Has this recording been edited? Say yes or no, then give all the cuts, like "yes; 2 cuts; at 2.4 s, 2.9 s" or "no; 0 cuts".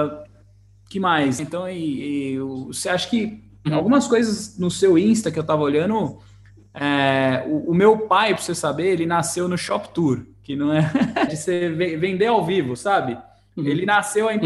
yes; 2 cuts; at 1.4 s, 11.3 s